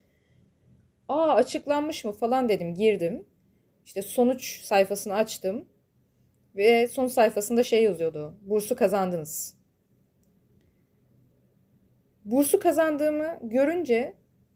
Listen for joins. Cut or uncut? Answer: uncut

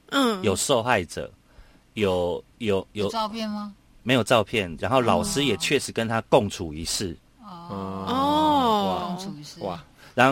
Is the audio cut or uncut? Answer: cut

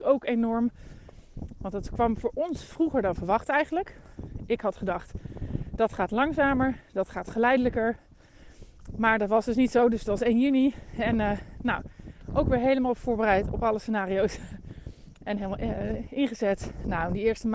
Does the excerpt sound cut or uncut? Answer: uncut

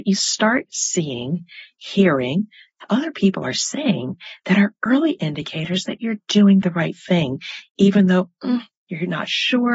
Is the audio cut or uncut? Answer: uncut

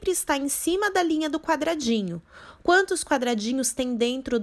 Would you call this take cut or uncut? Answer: cut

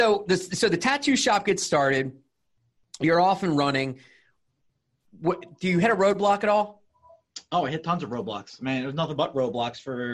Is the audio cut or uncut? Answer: uncut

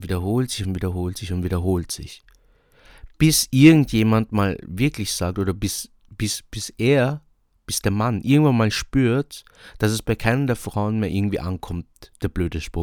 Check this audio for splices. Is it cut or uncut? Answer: uncut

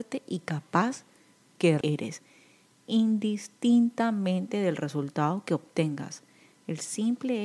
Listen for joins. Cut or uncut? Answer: cut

